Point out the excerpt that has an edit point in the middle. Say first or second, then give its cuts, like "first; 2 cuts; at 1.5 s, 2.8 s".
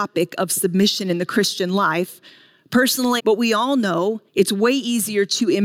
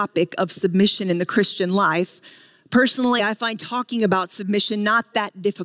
first; 2 cuts; at 3.2 s, 4.3 s